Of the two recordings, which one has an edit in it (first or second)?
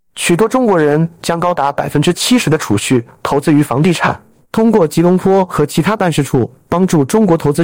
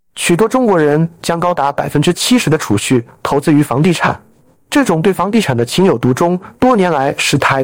first